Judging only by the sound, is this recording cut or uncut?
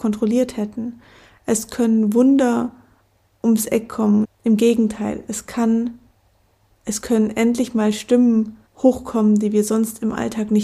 cut